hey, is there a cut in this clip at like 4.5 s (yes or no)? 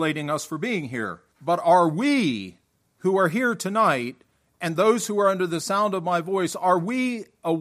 no